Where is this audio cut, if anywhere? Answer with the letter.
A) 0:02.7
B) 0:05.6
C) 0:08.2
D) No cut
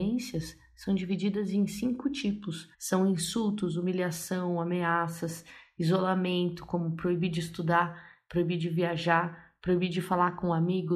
A